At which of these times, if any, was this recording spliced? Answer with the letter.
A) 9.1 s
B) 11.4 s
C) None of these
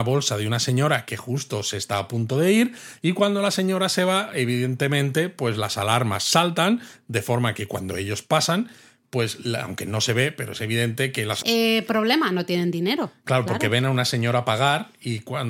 B